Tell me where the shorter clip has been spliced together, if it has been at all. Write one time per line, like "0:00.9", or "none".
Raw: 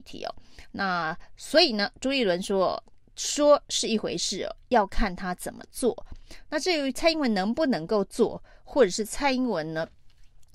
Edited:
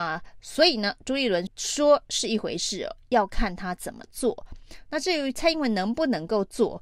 0:01.5